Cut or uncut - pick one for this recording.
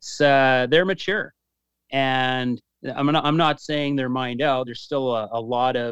uncut